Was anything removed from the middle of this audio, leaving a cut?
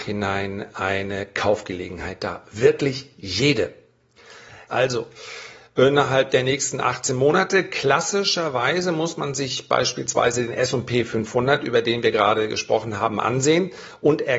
yes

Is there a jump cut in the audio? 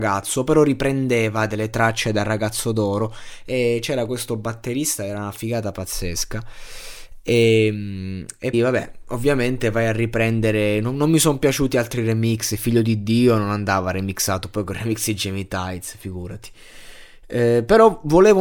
yes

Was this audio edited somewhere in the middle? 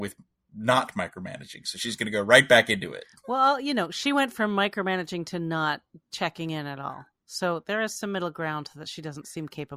no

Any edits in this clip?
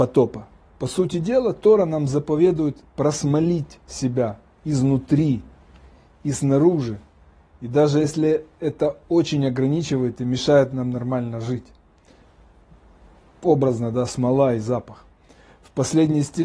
no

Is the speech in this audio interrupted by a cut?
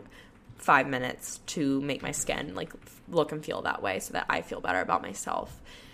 no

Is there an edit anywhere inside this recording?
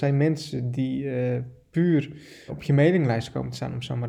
yes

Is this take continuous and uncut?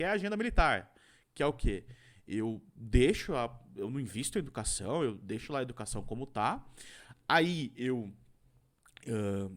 yes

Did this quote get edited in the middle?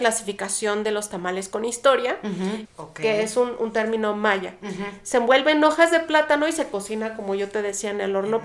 yes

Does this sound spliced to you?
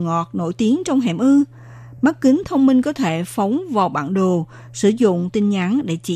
no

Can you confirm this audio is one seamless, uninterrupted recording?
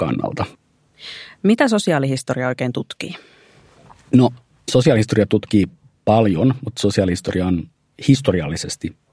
yes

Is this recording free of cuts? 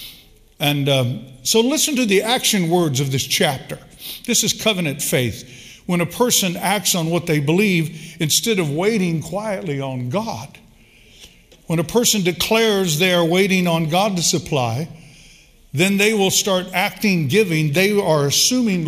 yes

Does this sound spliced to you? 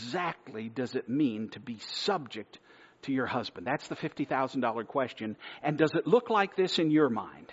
no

